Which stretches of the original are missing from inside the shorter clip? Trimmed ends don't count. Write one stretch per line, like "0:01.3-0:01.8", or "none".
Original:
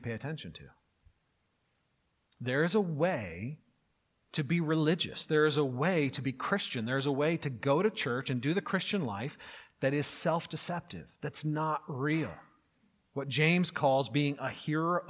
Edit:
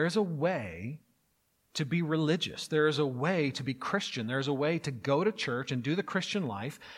none